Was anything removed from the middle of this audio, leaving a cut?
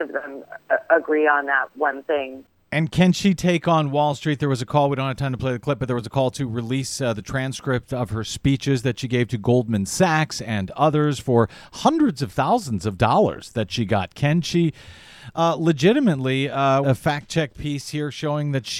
yes; 1 cut; at 16.8 s

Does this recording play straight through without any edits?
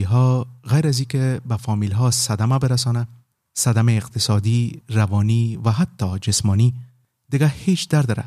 no; 1 cut; at 4.8 s

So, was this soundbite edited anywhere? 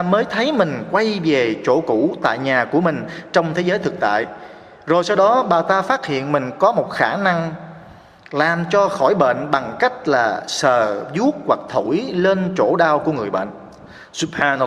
no; 0 cuts

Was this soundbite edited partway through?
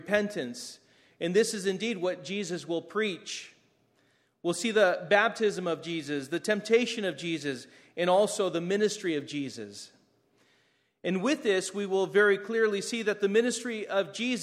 no; 0 cuts

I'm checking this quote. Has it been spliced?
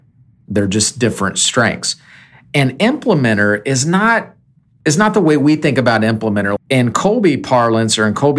yes; 1 cut; at 6.6 s

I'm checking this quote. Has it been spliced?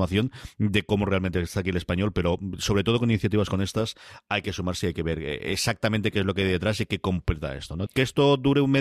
yes; 1 cut; at 7.9 s

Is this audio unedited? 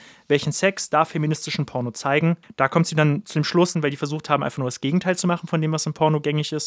no; 2 cuts; at 2.4 s, 3.7 s

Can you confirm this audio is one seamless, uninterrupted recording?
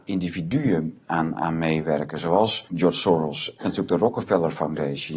yes; 0 cuts

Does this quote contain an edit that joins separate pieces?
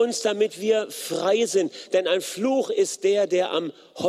no; 0 cuts

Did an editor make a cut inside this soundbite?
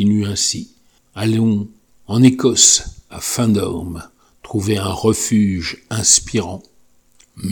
yes; 1 cut; at 1.0 s

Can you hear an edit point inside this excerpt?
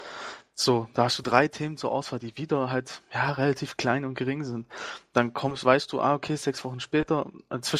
no; 0 cuts

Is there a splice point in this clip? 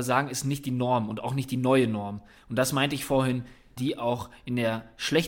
yes; 2 cuts; at 2.4 s, 3.8 s

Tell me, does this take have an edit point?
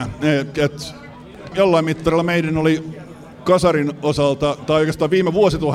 yes; 1 cut; at 1.5 s

